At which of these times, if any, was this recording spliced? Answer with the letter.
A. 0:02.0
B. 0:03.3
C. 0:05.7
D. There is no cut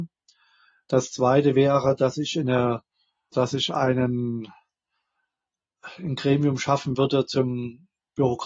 B